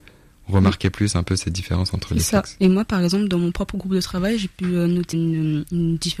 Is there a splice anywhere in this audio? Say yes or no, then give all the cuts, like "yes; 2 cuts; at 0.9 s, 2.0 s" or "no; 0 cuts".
yes; 1 cut; at 5.1 s